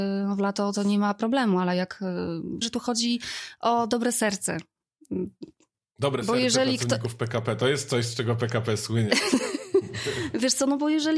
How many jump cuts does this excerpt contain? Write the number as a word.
one